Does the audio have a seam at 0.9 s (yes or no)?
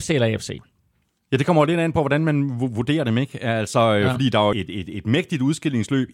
no